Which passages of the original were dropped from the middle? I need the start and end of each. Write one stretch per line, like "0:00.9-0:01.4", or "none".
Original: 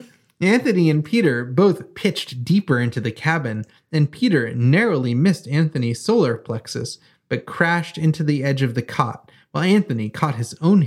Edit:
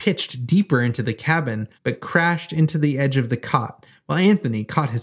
0:03.7-0:07.2